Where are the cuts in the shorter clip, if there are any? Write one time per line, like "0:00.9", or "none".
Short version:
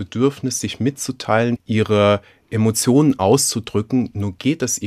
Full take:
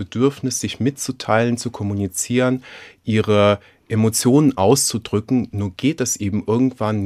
0:01.6

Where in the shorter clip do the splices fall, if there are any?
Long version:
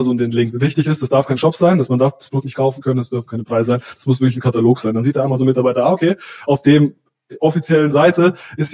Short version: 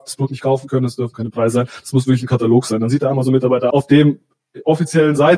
0:03.7

